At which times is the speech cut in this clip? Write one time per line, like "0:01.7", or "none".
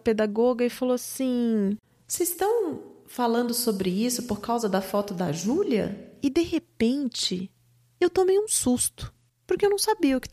none